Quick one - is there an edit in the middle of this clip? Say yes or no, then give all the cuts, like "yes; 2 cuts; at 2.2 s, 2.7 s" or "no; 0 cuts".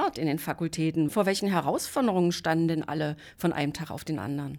yes; 1 cut; at 1.1 s